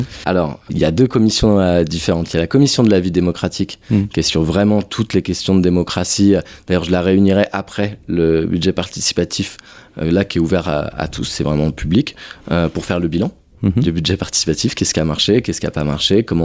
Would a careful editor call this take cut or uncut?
uncut